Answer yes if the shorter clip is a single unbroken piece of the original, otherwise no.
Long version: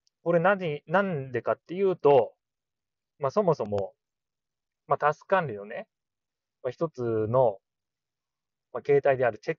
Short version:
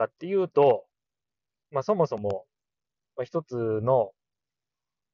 no